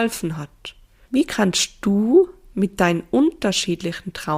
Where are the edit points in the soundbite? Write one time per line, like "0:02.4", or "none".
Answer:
0:01.0